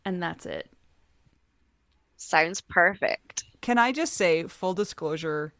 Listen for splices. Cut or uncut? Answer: uncut